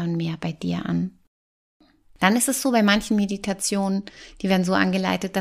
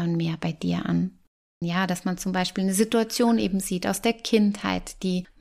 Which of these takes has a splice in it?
second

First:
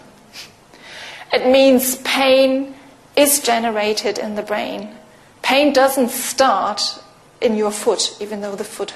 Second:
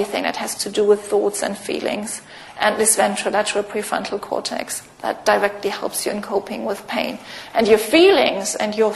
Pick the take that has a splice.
second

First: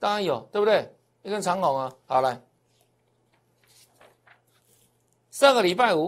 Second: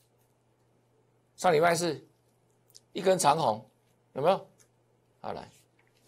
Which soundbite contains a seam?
second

